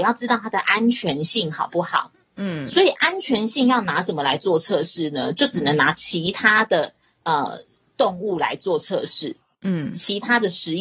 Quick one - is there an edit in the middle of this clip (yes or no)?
no